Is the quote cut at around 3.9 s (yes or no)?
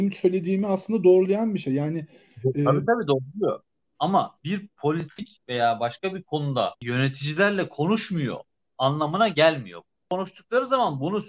yes